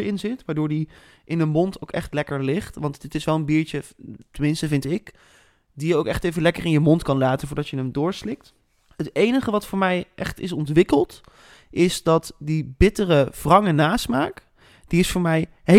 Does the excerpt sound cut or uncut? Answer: uncut